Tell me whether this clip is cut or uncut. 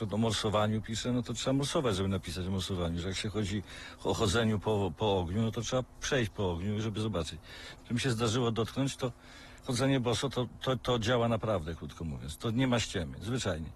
cut